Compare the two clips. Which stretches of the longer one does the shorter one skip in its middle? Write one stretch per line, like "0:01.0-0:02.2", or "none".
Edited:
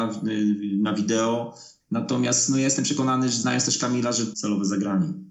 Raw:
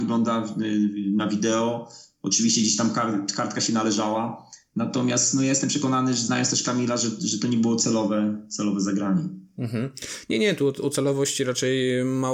0:02.1-0:04.6
0:07.2-0:08.5